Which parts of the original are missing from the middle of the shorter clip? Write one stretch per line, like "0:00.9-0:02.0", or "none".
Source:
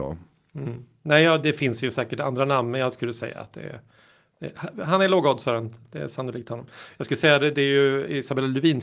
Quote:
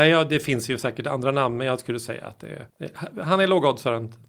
0:03.8-0:04.3